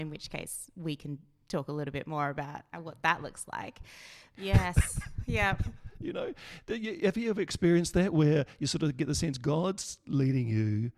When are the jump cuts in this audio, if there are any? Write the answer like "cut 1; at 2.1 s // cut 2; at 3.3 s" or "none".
cut 1; at 2.7 s // cut 2; at 4.3 s